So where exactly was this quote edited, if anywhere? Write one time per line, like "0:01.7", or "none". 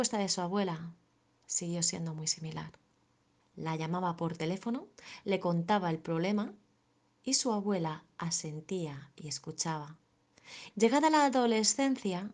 0:03.4
0:10.7